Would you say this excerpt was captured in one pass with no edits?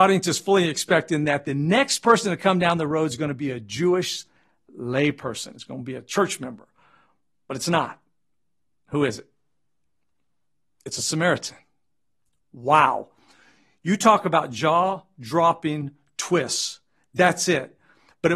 yes; 0 cuts

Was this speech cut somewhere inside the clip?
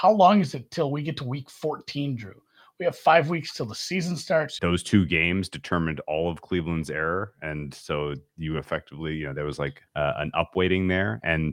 yes; 2 cuts; at 4.6 s, 9.9 s

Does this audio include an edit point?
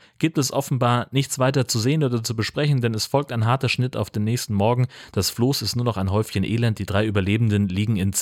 no; 0 cuts

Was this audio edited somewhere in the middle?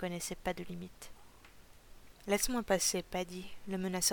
no; 0 cuts

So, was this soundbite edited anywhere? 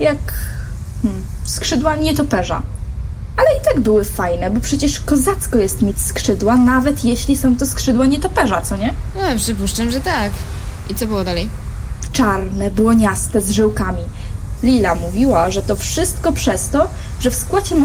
yes; 2 cuts; at 12.1 s, 14.6 s

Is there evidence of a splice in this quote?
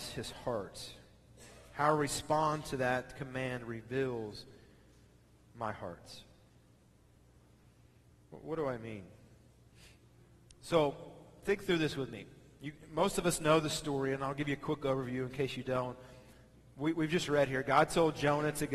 no; 0 cuts

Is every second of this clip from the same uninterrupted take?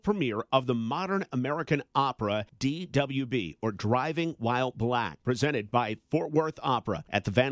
yes; 0 cuts

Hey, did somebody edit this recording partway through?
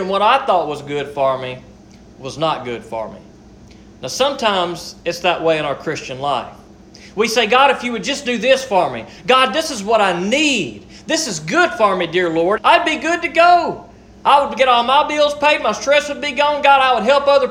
yes; 1 cut; at 12.6 s

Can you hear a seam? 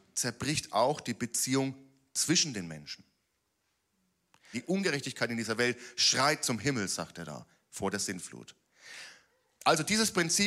yes; 1 cut; at 4.5 s

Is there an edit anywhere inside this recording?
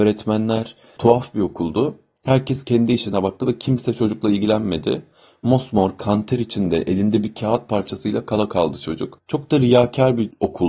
yes; 1 cut; at 9.2 s

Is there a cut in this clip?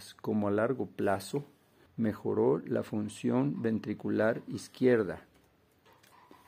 yes; 1 cut; at 1.9 s

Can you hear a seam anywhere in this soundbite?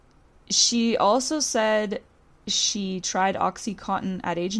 no; 0 cuts

